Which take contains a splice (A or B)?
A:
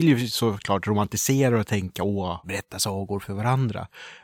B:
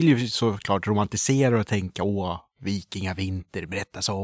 A